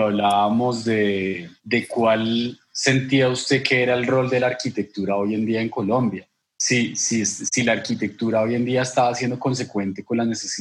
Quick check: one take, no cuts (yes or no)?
yes